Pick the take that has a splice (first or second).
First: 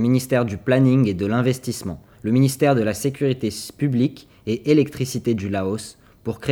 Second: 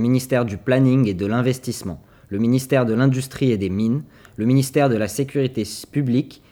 first